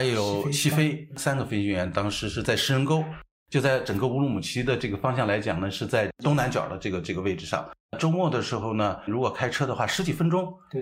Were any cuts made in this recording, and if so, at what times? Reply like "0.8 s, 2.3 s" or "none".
none